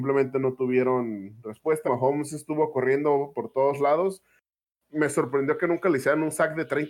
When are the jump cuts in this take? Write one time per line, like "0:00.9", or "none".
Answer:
0:01.8

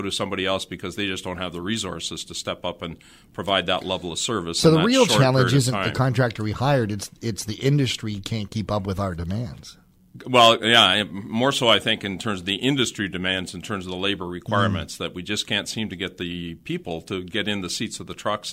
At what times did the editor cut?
none

